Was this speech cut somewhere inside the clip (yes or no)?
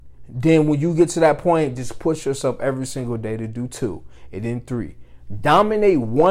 no